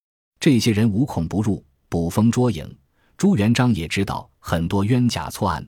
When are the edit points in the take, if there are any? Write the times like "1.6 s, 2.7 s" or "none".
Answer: none